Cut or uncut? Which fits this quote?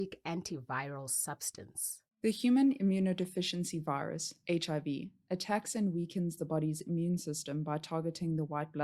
uncut